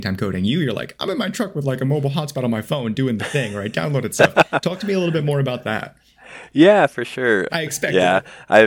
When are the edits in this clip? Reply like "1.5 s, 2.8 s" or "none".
7.5 s